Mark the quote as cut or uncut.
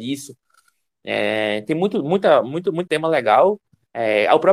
cut